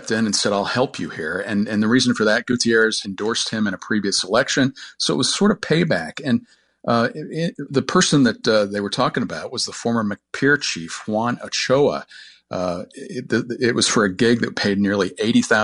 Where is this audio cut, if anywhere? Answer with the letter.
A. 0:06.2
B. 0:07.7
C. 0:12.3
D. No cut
B